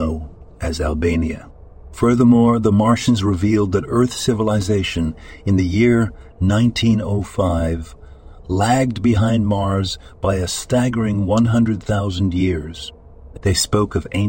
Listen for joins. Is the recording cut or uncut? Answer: cut